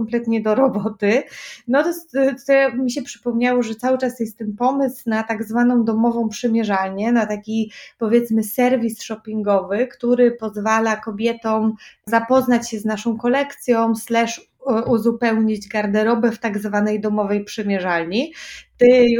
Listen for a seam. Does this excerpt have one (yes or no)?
no